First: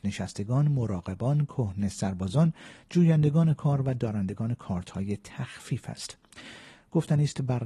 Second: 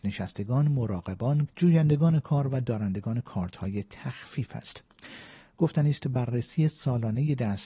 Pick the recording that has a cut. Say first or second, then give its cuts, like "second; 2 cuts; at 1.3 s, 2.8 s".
second; 1 cut; at 1.5 s